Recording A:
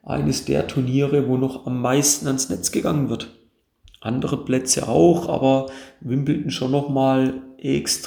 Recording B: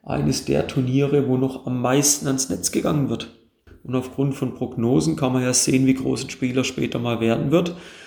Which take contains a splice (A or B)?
B